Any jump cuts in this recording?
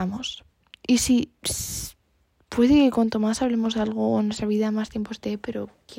no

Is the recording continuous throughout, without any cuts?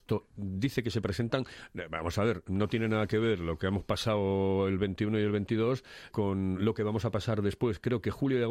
no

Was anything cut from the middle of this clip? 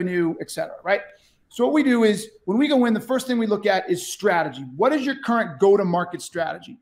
no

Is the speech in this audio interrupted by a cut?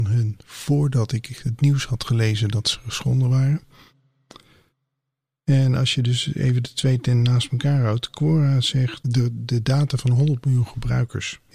no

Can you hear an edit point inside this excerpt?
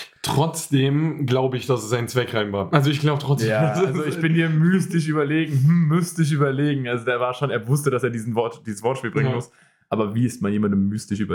no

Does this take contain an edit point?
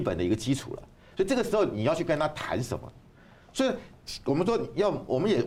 no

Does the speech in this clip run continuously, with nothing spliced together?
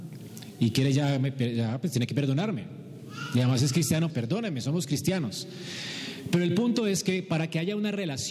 no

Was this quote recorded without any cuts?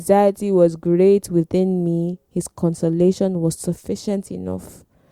yes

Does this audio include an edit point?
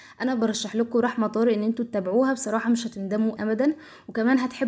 yes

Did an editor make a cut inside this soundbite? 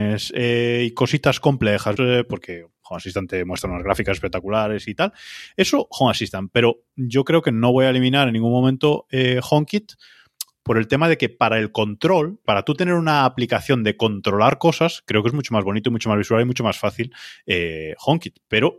yes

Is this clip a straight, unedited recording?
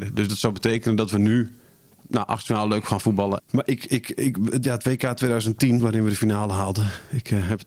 no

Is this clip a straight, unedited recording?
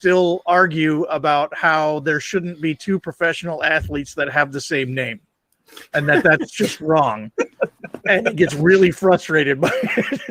yes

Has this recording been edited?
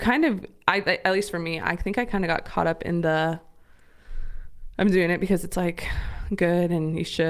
no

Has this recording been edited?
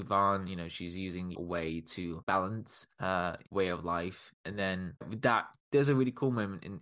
yes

